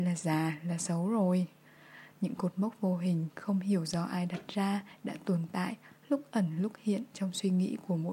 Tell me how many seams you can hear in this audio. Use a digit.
0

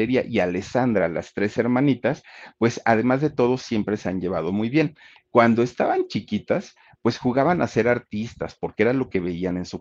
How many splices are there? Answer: 0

